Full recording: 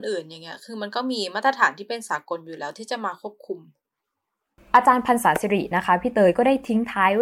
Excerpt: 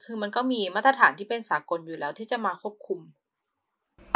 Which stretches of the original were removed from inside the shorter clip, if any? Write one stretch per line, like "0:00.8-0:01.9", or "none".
none

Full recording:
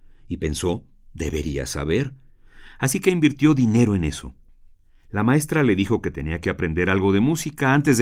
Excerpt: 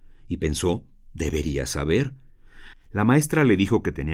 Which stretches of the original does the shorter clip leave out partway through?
0:02.7-0:04.9

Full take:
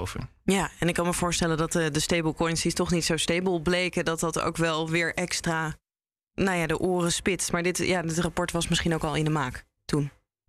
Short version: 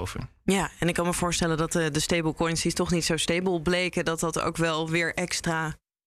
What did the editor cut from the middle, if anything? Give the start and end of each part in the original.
none

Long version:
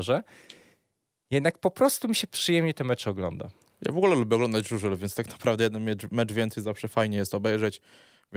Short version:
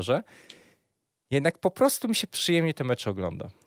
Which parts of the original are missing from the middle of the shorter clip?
none

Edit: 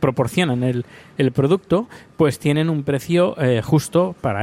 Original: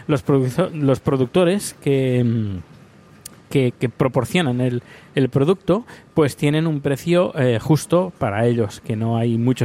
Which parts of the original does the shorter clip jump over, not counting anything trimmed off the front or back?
none

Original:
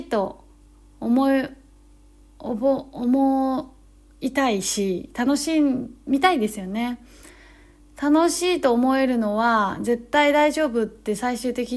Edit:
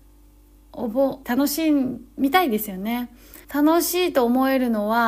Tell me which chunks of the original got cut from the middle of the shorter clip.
0:02.9-0:05.1
0:07.3-0:07.9

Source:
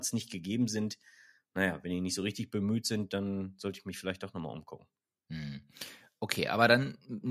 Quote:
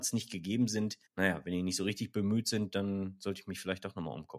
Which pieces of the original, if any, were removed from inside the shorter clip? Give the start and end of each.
0:01.1-0:01.4

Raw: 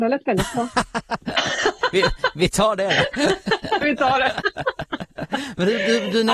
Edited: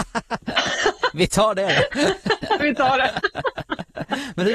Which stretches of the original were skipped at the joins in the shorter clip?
0:01.9-0:02.3

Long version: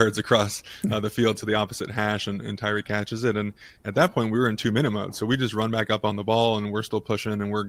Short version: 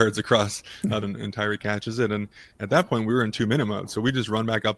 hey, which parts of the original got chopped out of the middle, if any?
0:01.0-0:02.3

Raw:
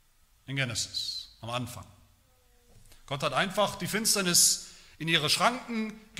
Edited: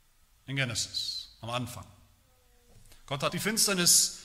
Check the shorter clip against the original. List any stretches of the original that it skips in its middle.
0:03.3-0:03.8

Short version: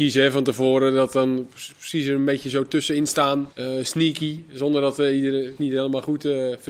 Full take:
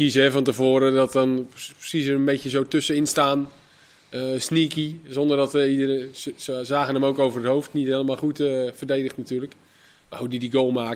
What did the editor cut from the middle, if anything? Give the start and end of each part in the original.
0:03.5-0:04.1
0:06.1-0:07.7

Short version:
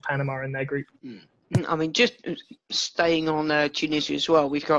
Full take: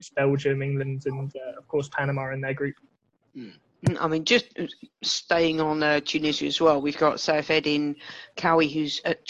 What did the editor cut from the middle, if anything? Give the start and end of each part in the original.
0:02.8-0:03.3

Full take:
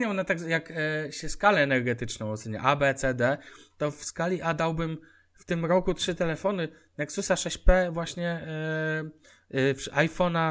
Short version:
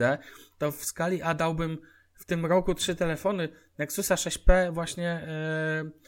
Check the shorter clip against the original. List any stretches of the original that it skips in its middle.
none

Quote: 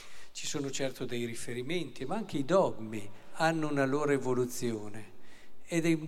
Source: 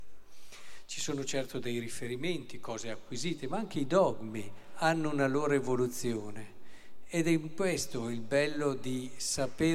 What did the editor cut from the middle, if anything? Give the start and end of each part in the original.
0:02.5-0:03.4

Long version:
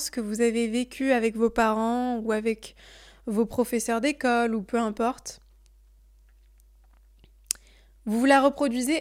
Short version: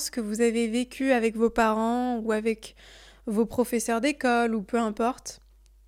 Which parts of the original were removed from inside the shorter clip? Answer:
none

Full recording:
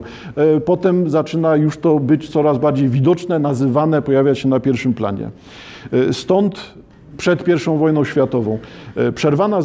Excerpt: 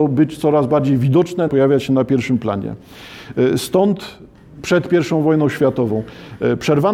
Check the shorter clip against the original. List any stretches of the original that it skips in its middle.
0:03.4-0:04.0

